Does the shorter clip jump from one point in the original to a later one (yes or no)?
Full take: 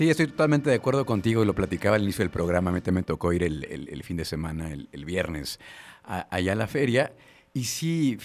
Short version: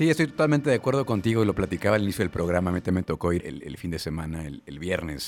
yes